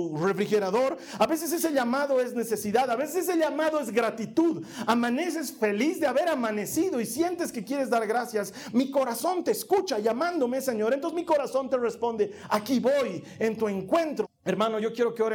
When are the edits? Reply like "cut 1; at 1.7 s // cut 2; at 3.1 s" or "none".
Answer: cut 1; at 1.2 s // cut 2; at 14.2 s